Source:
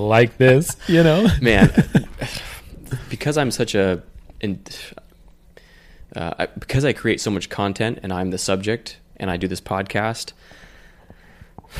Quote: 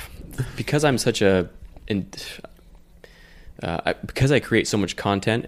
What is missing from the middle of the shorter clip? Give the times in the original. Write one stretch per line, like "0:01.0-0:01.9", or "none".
none